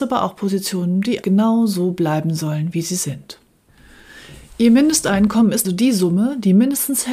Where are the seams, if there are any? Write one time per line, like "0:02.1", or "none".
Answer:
0:01.2
0:05.6